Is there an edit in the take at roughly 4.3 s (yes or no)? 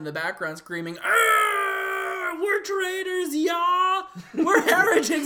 no